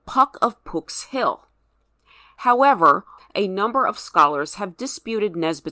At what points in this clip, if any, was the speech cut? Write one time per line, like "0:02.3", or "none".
0:03.2